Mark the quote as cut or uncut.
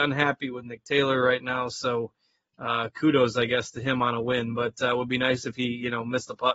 uncut